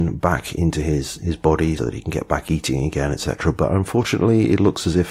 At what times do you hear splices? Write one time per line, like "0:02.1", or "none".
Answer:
0:01.8